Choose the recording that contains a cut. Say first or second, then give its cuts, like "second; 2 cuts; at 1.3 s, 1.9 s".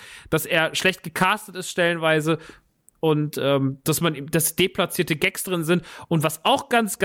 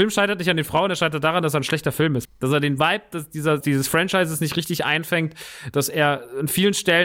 second; 2 cuts; at 2.2 s, 3.6 s